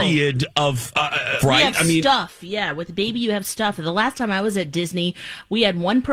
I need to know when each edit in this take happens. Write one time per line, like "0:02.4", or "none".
0:01.4